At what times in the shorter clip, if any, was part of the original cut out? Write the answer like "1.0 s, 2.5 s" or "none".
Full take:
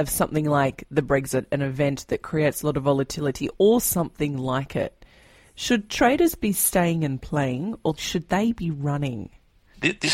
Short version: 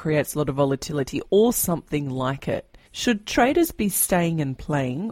2.8 s